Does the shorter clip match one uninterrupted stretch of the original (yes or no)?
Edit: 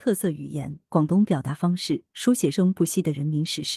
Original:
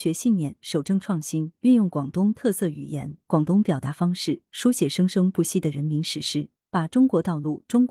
no